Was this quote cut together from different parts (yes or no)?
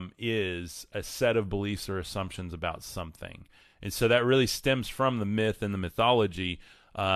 no